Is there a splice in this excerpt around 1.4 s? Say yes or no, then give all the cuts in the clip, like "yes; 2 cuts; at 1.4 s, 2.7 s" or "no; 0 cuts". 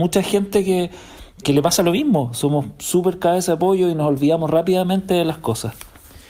yes; 1 cut; at 1.4 s